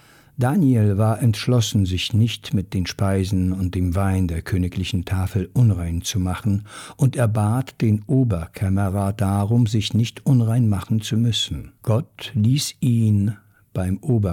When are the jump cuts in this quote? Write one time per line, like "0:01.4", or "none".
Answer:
0:11.8